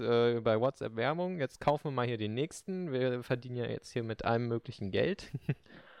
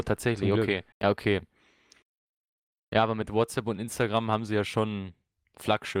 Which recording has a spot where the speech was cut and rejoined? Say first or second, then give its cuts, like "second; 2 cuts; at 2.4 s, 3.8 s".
second; 1 cut; at 0.9 s